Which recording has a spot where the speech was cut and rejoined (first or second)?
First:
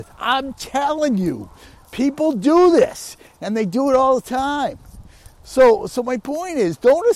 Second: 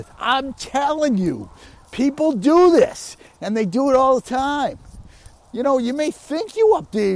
second